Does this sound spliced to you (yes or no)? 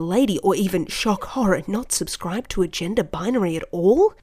no